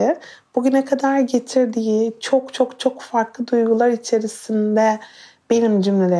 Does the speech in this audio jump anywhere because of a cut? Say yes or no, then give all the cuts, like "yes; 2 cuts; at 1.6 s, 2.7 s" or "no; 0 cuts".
no; 0 cuts